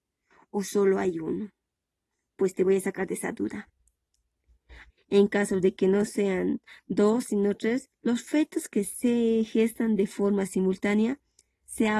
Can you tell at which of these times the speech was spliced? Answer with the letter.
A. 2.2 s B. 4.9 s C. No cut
B